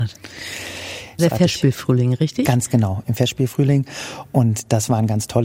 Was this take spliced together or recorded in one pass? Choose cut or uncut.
cut